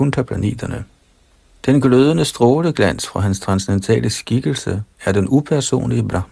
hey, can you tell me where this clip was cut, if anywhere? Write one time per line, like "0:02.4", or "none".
0:01.6